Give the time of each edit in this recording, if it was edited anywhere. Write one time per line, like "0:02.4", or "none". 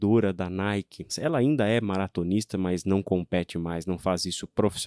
0:01.1